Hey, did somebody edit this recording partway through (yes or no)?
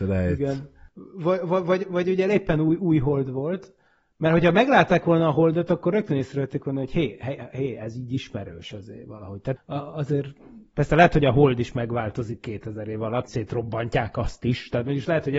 yes